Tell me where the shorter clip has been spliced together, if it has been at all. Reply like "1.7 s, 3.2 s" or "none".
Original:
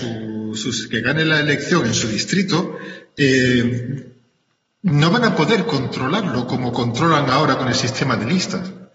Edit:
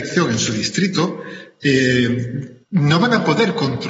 2.6 s